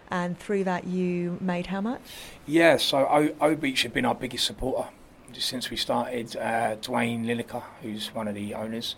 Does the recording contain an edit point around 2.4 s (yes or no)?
no